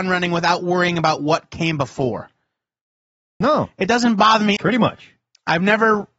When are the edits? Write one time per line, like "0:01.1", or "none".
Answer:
0:03.4
0:04.6

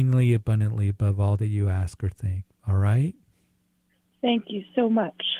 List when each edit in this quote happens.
none

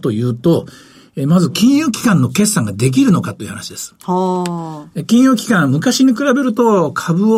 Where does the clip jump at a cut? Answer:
none

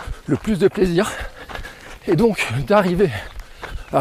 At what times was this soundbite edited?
0:02.0

